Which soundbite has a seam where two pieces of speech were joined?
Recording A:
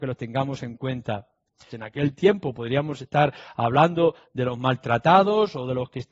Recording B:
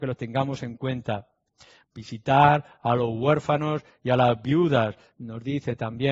A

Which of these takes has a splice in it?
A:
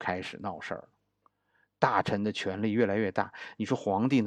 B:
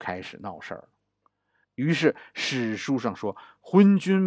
B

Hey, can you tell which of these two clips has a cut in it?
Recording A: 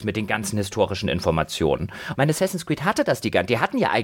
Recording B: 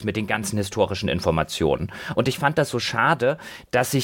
A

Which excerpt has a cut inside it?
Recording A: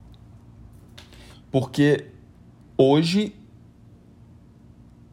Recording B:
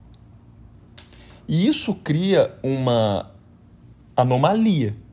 A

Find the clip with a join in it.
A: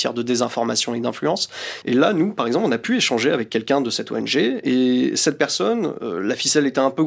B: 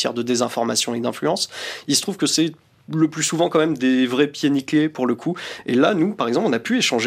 A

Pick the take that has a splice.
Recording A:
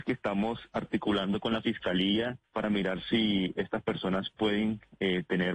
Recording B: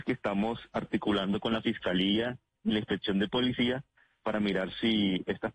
A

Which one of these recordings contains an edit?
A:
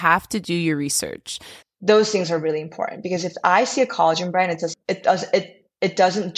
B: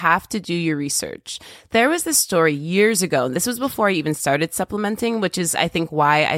A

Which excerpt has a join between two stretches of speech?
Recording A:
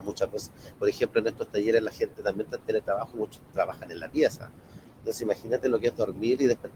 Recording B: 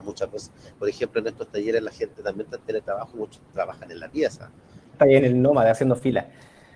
B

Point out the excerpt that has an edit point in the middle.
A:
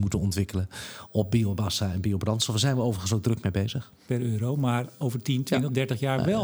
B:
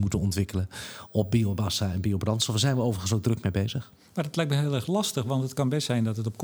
A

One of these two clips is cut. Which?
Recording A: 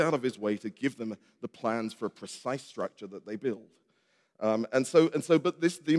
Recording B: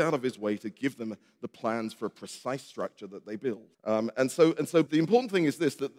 B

